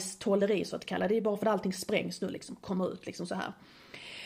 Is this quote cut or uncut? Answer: uncut